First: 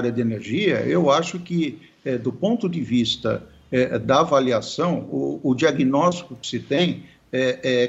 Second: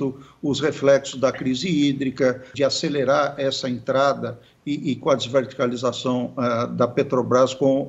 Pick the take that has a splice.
second; 1 cut; at 2.5 s

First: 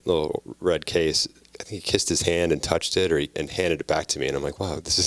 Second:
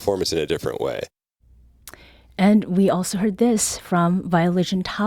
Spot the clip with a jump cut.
first; 2 cuts; at 1.5 s, 3.3 s

